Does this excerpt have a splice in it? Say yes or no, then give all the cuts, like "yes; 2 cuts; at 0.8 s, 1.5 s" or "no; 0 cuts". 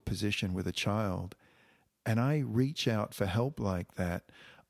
no; 0 cuts